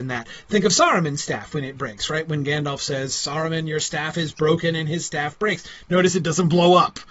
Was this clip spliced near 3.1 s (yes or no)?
no